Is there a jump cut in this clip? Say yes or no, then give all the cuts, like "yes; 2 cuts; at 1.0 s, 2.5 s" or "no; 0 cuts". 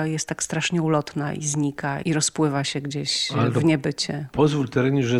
yes; 1 cut; at 2.0 s